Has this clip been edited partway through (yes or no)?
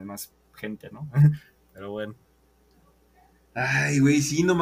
no